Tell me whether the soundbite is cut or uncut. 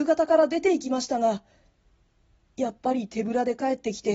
uncut